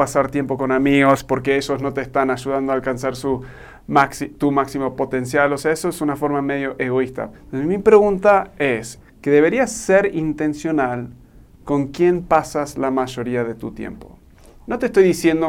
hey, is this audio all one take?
no; 2 cuts; at 7.3 s, 9.0 s

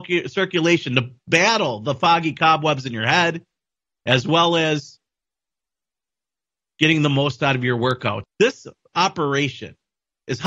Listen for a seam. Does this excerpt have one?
yes; 1 cut; at 8.2 s

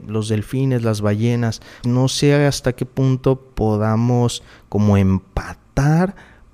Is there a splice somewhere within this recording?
yes; 1 cut; at 1.8 s

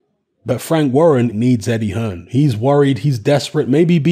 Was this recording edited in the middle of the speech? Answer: yes; 1 cut; at 1.3 s

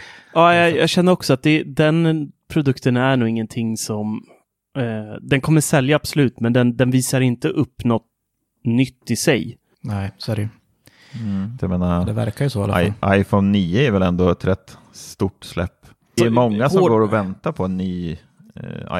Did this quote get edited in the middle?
yes; 2 cuts; at 11.6 s, 16.2 s

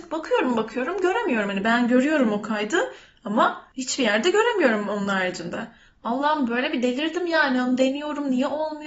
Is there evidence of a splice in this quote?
no; 0 cuts

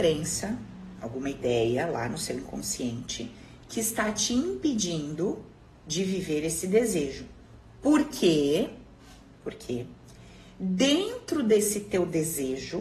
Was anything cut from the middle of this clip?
no; 0 cuts

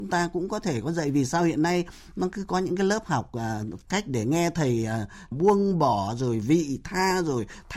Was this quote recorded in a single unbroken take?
no; 2 cuts; at 3.8 s, 5.3 s

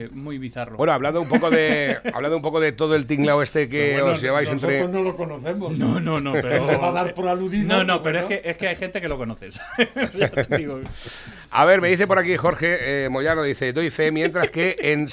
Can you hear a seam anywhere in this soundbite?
no; 0 cuts

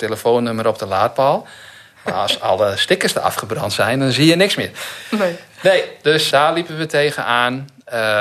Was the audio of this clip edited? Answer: yes; 1 cut; at 6.3 s

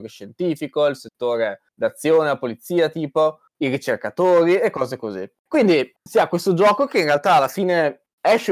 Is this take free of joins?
no; 1 cut; at 6.0 s

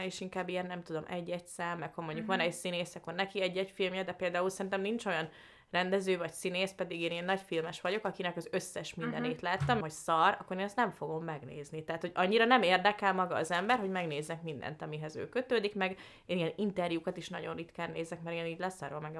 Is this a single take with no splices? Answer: no; 1 cut; at 9.8 s

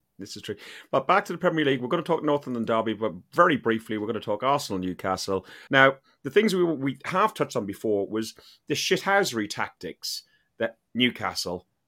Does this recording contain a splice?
yes; 1 cut; at 5.7 s

